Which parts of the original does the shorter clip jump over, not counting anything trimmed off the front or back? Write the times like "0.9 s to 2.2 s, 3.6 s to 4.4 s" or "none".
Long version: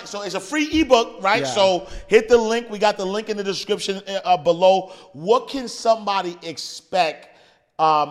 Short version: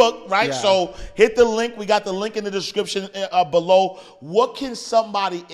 none